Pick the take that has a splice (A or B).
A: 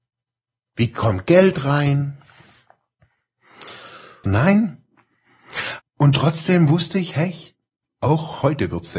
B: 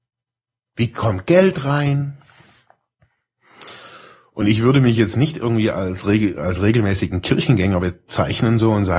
A